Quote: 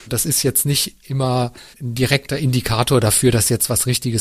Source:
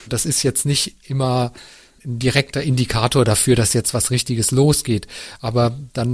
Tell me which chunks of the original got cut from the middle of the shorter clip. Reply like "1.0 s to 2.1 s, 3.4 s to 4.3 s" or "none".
1.7 s to 1.9 s